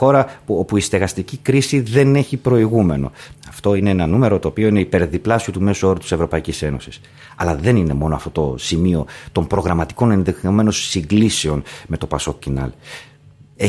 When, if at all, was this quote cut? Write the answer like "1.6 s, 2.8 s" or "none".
3.3 s